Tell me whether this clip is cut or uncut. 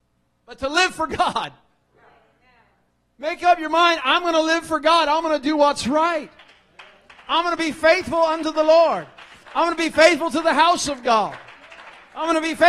uncut